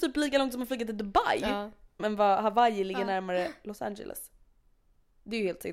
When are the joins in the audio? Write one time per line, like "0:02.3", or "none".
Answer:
0:02.0

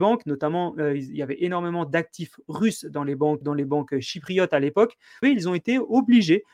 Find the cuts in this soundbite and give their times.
0:03.4
0:05.2

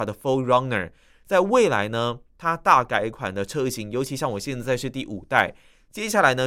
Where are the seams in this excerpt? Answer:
0:01.1

